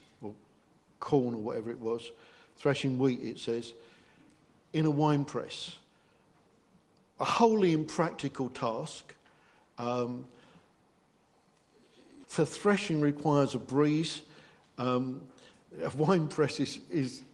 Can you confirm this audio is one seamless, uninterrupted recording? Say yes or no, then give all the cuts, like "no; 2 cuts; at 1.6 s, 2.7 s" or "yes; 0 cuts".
no; 1 cut; at 12.2 s